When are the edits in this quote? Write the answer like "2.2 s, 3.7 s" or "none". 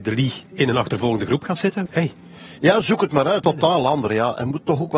1.9 s, 3.4 s